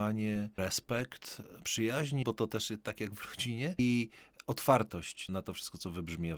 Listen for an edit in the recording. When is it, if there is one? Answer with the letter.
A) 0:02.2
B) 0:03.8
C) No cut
A